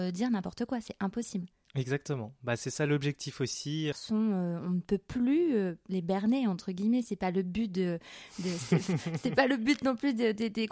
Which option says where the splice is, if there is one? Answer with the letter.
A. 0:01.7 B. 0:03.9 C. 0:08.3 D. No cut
B